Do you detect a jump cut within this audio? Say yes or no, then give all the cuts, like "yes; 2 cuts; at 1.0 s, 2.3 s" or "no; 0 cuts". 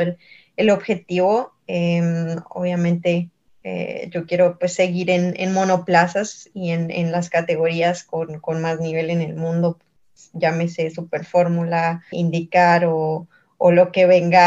yes; 1 cut; at 12.1 s